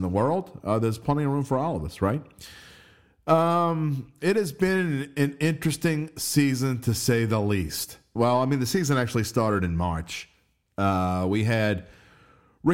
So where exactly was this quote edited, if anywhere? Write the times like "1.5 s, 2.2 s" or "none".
8.2 s